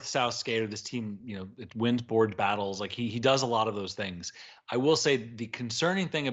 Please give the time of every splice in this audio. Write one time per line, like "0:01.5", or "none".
none